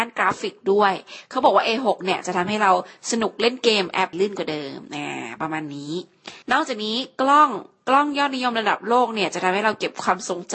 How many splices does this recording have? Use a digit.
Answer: 2